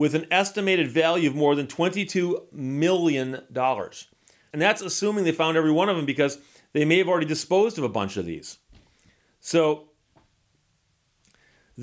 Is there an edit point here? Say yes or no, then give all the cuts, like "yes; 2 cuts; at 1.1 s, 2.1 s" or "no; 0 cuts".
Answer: yes; 1 cut; at 4.5 s